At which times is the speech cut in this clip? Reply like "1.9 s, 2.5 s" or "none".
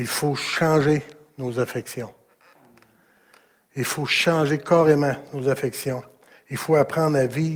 none